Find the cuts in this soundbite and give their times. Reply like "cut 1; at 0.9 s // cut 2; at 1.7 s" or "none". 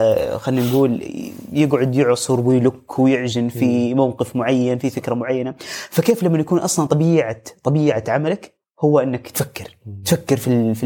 none